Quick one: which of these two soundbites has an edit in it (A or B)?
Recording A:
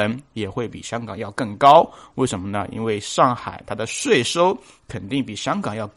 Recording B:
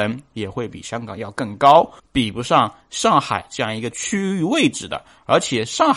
B